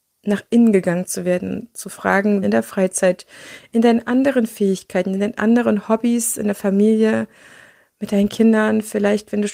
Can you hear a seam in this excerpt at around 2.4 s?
yes; 1 cut; at 2.4 s

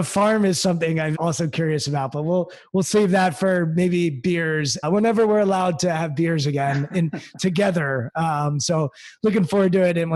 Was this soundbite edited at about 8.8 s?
no; 2 cuts; at 1.1 s, 4.8 s

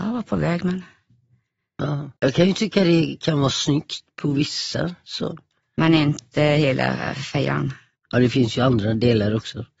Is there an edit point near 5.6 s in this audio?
no; 2 cuts; at 2.2 s, 8.0 s

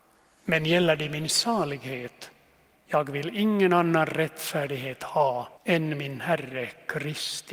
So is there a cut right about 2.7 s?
yes; 2 cuts; at 2.7 s, 5.5 s

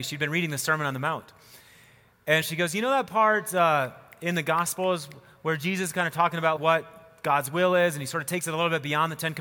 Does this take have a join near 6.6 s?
yes; 1 cut; at 6.6 s

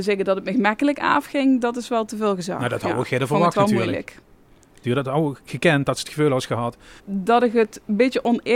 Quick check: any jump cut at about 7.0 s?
yes; 2 cuts; at 4.8 s, 7.0 s

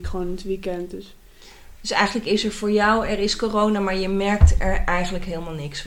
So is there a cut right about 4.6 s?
no; 0 cuts

